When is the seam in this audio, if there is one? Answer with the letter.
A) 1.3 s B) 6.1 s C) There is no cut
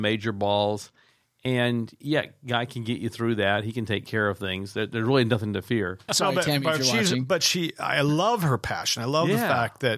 B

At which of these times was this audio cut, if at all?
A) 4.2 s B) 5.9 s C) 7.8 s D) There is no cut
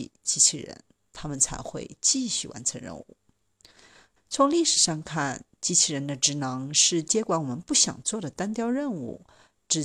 A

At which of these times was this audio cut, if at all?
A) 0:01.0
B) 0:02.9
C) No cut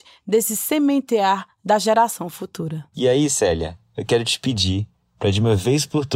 B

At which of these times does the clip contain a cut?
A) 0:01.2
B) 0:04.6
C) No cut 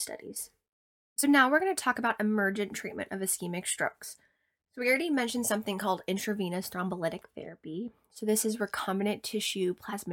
C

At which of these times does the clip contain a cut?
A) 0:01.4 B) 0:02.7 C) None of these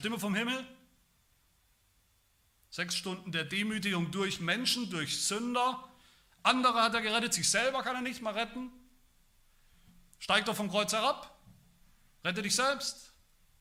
C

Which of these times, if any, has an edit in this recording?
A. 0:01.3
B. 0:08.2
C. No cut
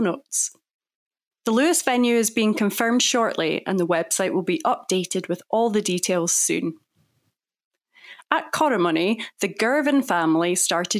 A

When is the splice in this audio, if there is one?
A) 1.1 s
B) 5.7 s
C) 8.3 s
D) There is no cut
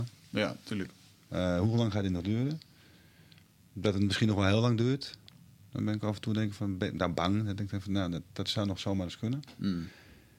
C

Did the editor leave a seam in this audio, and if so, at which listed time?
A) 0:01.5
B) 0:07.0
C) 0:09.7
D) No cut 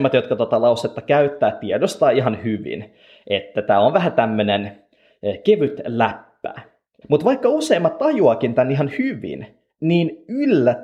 B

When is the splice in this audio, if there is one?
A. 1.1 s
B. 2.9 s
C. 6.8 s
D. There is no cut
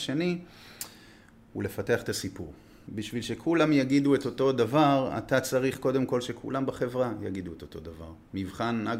B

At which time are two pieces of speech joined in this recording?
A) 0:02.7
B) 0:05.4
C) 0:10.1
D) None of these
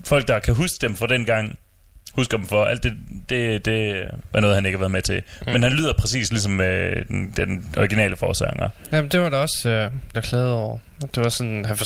C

